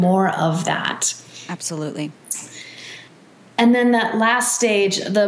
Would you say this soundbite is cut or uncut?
uncut